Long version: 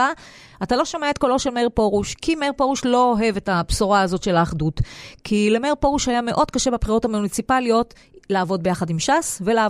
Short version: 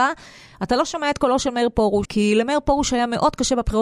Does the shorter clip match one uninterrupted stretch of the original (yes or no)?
no